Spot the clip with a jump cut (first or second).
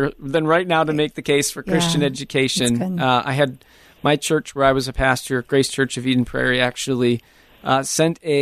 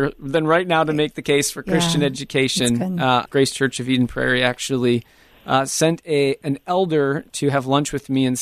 second